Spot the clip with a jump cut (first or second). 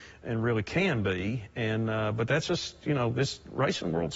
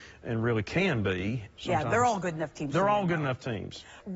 second